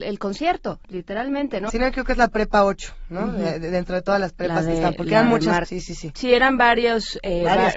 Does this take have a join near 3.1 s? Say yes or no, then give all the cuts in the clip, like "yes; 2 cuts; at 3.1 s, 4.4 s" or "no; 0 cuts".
no; 2 cuts; at 1.7 s, 5.6 s